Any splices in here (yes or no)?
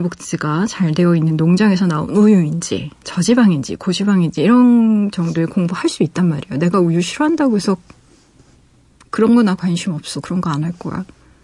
no